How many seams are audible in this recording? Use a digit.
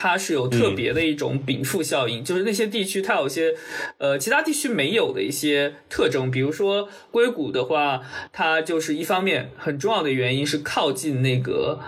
0